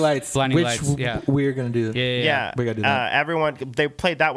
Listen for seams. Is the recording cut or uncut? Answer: uncut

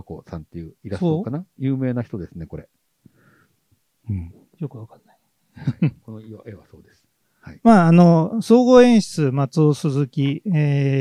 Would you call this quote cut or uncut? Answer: uncut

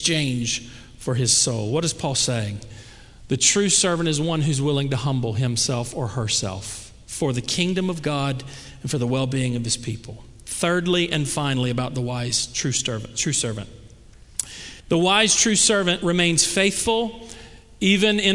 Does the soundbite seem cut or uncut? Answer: cut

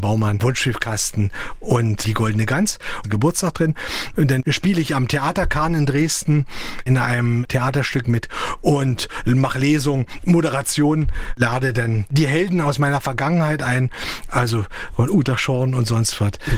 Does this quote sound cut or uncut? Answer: cut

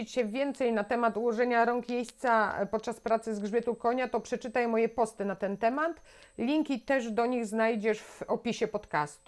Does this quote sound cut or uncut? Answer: uncut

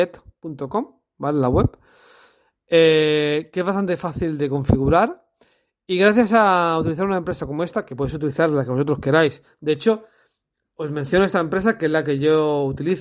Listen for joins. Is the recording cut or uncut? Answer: uncut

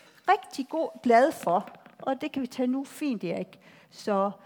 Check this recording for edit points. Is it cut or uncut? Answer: uncut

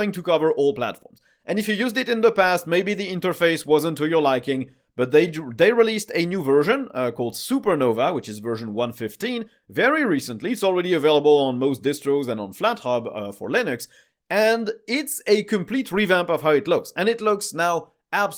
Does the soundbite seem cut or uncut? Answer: uncut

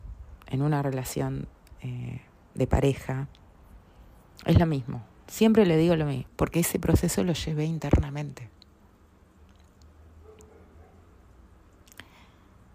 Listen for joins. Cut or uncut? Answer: cut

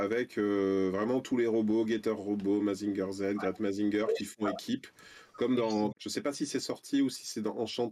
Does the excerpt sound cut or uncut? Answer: cut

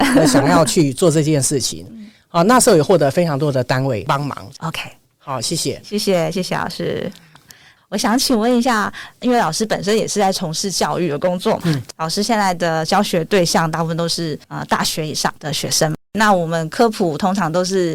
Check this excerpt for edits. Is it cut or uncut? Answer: cut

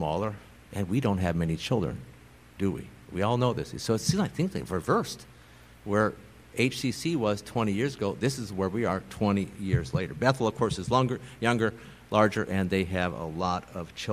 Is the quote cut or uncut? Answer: uncut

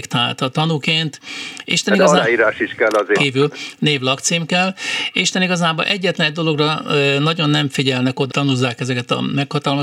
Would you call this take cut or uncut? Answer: cut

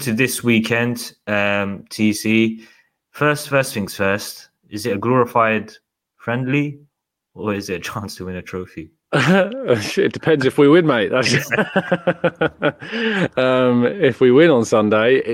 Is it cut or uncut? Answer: uncut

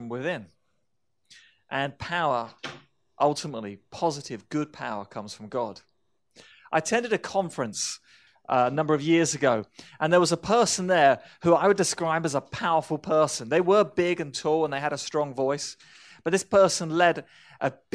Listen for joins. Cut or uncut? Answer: uncut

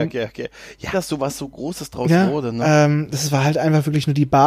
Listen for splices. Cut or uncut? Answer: cut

